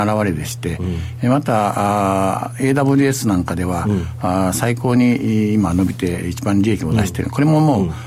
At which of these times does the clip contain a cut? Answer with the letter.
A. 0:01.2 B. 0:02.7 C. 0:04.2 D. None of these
D